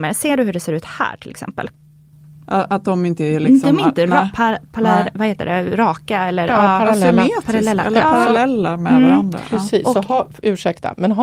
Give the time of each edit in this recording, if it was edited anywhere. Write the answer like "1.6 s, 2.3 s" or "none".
none